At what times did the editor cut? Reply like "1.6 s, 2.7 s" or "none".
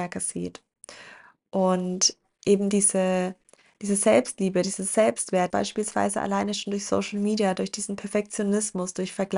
5.5 s